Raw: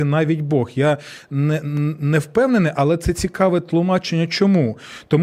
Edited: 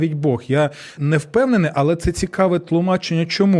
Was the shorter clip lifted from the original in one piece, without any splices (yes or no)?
no